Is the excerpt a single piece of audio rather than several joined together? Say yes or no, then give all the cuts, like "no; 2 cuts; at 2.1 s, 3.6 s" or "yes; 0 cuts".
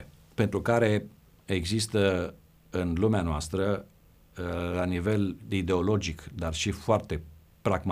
yes; 0 cuts